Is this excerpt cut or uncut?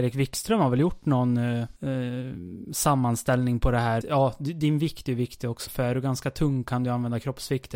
cut